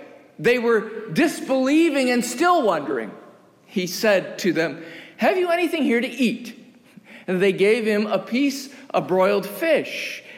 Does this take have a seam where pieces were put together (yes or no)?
no